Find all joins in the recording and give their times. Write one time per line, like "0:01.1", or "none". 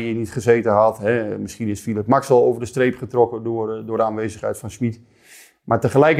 none